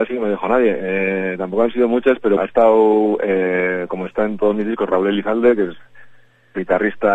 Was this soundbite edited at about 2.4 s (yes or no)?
yes